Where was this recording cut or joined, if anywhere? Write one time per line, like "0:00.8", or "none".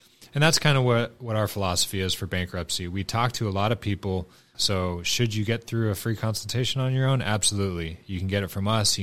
0:04.5